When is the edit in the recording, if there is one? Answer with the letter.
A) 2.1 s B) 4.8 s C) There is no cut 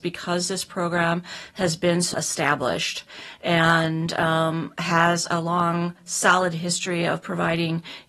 A